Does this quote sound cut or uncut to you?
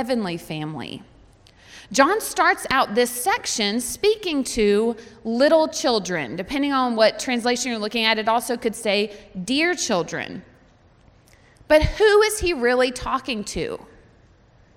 uncut